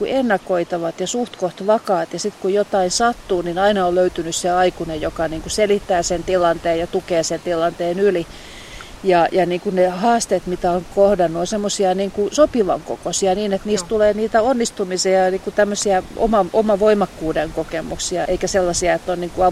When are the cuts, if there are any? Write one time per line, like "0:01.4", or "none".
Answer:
0:18.3